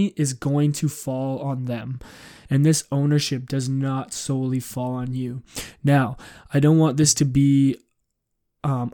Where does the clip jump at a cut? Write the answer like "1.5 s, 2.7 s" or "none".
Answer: 2.4 s